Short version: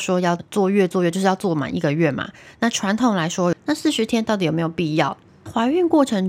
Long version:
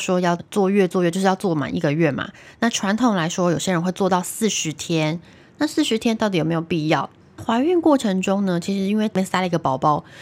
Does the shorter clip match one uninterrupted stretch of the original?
no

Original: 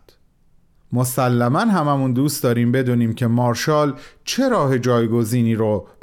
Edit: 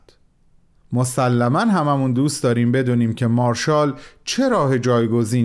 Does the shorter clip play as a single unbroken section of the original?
yes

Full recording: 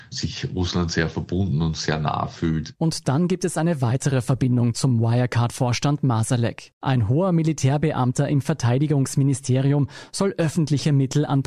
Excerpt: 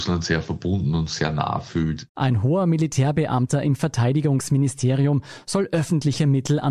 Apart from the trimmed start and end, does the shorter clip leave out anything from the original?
yes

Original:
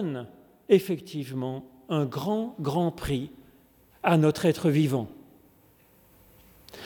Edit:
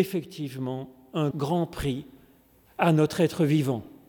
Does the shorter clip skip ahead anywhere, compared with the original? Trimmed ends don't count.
yes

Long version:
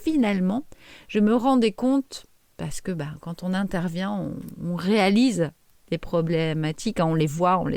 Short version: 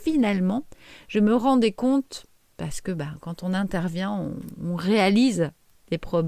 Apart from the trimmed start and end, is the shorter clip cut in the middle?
no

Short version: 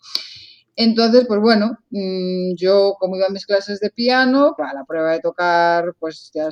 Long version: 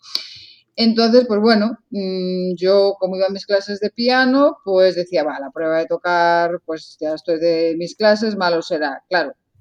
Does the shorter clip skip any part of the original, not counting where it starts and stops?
yes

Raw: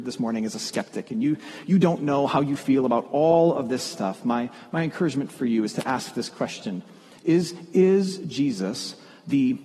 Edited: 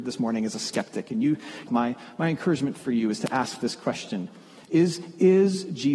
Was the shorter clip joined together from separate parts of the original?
yes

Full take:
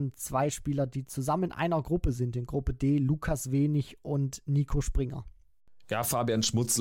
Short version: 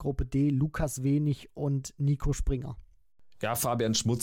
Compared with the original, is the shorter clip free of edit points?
yes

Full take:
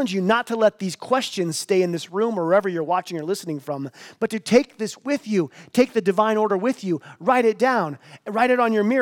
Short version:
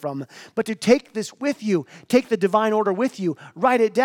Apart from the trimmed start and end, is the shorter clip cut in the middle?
no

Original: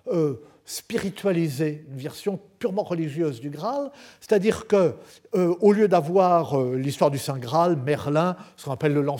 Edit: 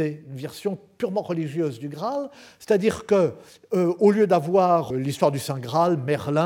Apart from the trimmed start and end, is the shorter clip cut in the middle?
yes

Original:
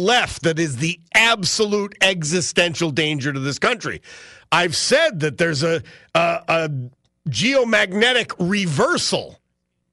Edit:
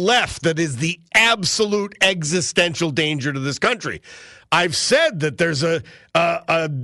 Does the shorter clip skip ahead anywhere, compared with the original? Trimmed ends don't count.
no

